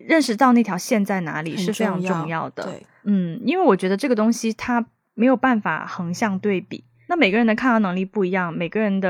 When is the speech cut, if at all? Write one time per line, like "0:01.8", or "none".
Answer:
none